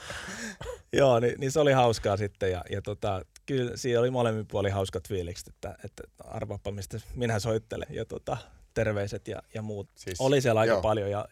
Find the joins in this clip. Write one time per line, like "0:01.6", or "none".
0:07.8
0:09.9